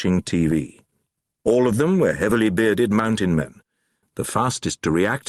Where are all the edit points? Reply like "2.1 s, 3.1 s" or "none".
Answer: 4.0 s